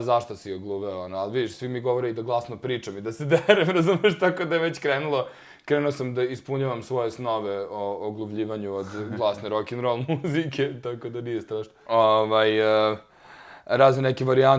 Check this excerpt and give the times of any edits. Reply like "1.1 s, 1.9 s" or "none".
11.9 s